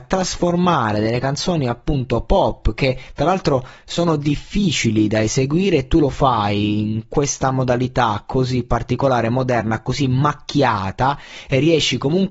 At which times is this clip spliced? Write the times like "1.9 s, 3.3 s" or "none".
none